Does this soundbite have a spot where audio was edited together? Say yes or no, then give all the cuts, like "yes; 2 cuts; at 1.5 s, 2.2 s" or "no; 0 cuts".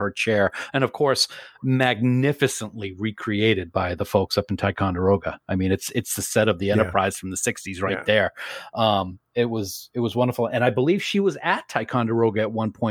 no; 0 cuts